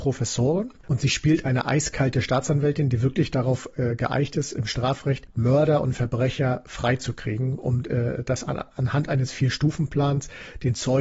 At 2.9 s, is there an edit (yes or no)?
no